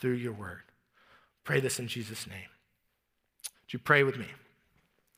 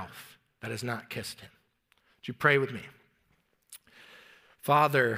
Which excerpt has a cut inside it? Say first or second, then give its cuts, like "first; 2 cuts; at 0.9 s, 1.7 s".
first; 1 cut; at 3.5 s